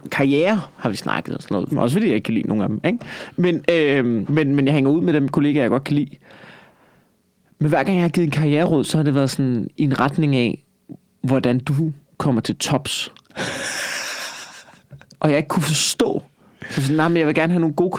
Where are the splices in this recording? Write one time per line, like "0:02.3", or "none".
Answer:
0:01.7
0:04.2